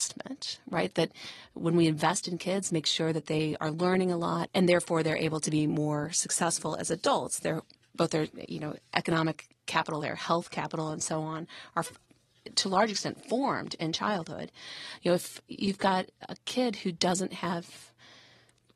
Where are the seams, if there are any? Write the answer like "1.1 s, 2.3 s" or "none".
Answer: 4.5 s, 10.0 s